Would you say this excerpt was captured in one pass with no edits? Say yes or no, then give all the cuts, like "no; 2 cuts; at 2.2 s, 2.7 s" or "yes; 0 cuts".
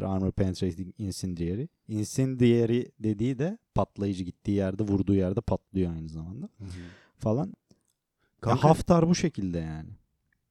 yes; 0 cuts